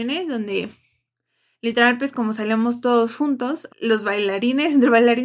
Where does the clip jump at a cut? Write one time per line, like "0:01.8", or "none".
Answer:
0:03.7